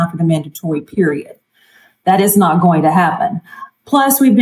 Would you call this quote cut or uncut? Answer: uncut